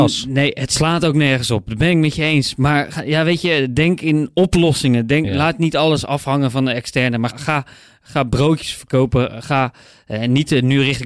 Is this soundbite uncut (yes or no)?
no